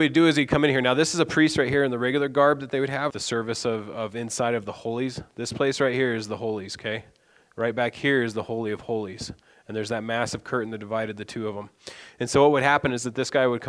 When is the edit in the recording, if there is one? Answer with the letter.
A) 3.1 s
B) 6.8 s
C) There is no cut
A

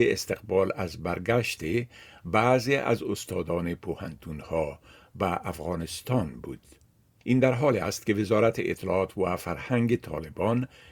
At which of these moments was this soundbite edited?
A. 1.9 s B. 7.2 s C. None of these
B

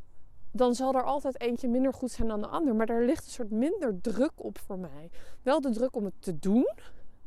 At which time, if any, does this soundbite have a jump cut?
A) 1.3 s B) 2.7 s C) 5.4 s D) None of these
D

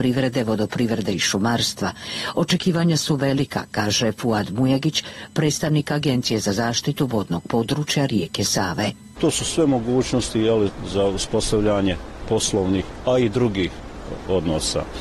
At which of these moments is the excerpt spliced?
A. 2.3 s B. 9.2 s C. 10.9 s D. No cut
B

